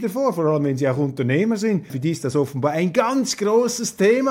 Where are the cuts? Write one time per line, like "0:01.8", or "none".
0:01.9